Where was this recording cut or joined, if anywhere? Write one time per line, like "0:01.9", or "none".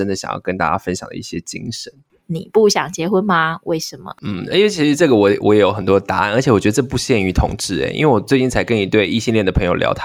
0:02.2